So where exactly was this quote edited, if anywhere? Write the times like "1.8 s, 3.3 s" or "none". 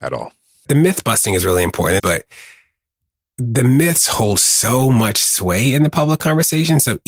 2.0 s